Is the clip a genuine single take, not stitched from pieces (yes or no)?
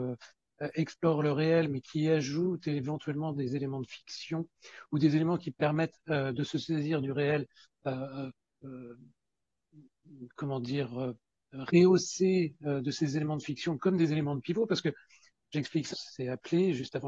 no